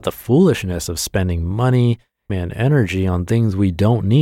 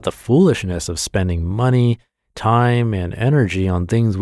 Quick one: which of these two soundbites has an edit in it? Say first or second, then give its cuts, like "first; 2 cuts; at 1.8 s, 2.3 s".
first; 1 cut; at 2.3 s